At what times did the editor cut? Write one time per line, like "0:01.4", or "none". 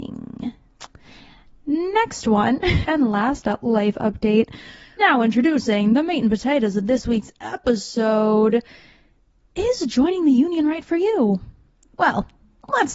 0:02.8
0:05.0